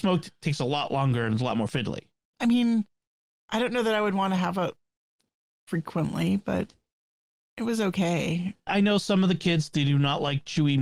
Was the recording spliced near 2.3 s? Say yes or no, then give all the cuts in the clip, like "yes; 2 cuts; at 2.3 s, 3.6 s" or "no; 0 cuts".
yes; 2 cuts; at 2.3 s, 8.7 s